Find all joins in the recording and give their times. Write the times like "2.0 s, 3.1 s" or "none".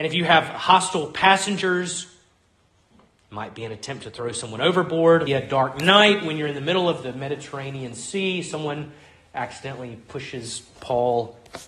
5.3 s